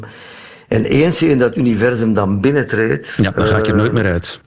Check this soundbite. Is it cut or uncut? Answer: uncut